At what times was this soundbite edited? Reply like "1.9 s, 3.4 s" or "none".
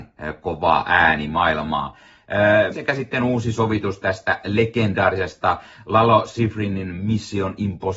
2.7 s